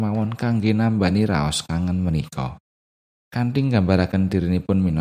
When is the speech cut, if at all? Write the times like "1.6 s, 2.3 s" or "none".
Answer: 3.2 s